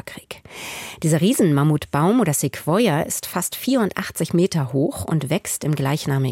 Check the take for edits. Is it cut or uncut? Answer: uncut